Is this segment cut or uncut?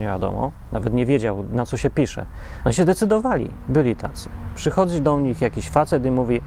cut